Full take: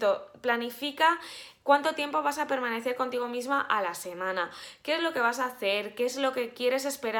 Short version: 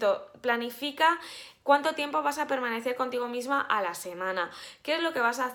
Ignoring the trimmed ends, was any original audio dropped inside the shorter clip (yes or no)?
no